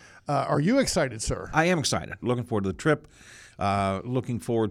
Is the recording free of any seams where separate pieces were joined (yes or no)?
no